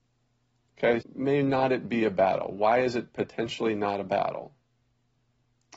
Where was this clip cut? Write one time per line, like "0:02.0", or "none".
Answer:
0:01.0